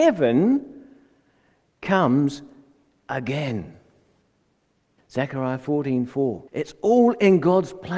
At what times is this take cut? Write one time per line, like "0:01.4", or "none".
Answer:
0:05.0
0:06.5